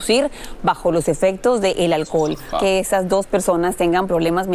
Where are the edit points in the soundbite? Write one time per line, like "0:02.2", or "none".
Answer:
0:02.5